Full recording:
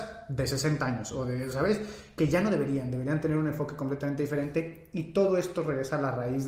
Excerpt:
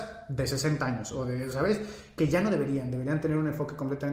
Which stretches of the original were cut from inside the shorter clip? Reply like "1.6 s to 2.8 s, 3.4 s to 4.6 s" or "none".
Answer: none